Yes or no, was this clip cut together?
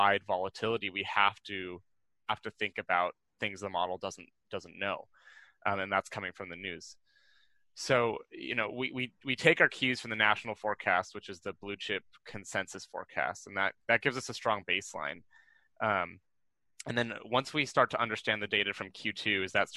no